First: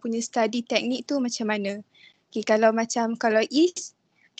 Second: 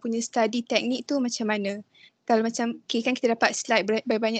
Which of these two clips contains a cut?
second; 1 cut; at 2.1 s

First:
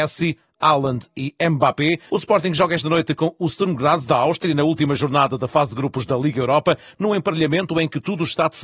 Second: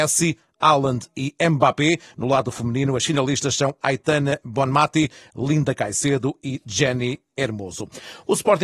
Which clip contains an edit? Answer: first; 1 cut; at 2.1 s

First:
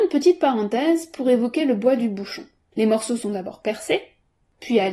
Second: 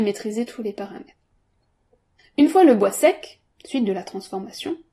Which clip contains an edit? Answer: first; 1 cut; at 2.7 s

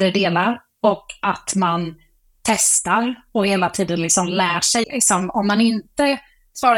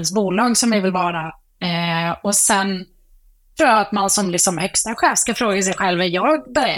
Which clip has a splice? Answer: first; 1 cut; at 4.8 s

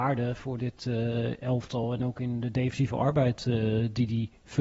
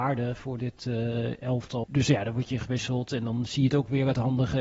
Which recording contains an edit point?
second; 1 cut; at 1.8 s

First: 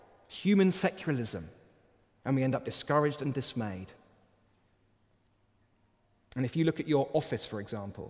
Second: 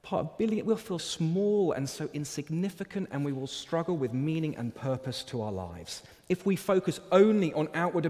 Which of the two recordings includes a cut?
second; 1 cut; at 1.0 s

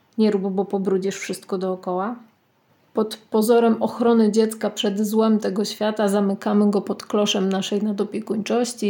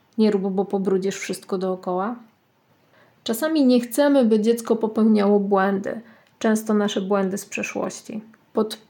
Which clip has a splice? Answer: first; 1 cut; at 2.9 s

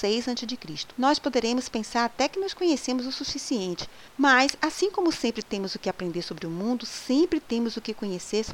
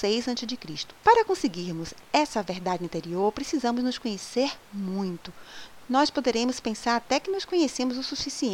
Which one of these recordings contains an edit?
first; 1 cut; at 1.0 s

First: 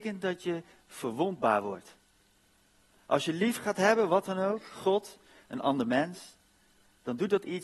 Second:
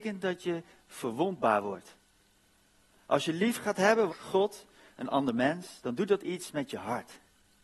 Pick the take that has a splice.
second; 2 cuts; at 4.1 s, 5.8 s

